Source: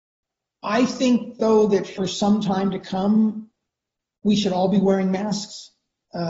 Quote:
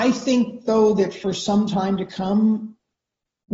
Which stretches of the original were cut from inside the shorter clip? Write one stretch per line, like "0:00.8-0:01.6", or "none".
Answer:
none